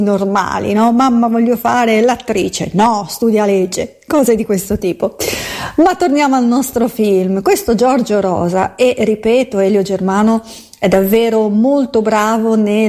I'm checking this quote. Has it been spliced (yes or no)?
no